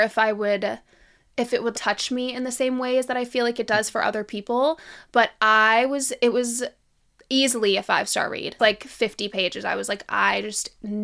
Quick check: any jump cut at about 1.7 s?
yes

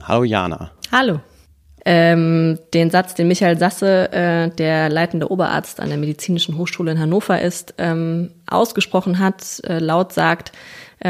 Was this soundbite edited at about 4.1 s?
no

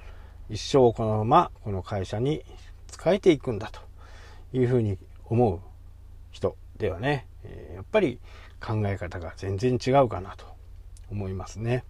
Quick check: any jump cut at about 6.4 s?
no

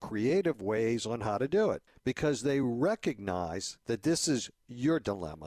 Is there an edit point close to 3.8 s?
yes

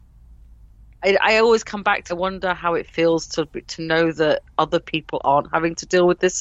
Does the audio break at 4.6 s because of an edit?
no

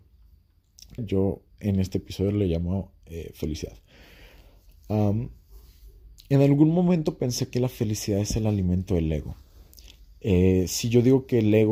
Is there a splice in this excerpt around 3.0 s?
no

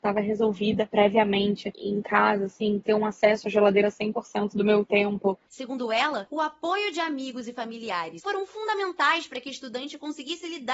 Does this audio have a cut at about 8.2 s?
yes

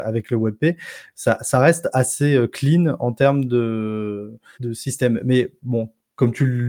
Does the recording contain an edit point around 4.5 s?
yes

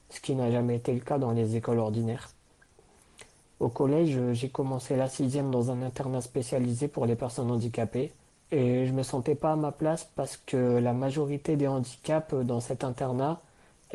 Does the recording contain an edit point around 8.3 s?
yes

